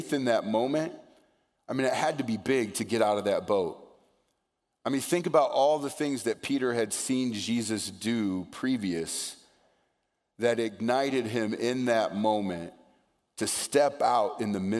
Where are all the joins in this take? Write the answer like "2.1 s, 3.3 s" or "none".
none